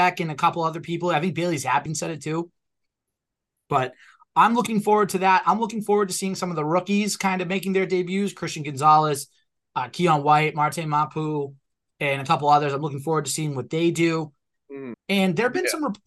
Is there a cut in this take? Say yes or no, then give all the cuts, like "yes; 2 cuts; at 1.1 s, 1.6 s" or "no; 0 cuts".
yes; 2 cuts; at 1.9 s, 14.9 s